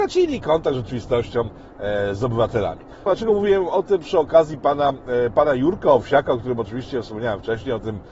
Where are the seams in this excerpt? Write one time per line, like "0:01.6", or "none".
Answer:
0:03.1